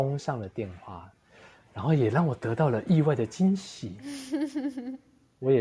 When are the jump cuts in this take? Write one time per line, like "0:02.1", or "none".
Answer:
none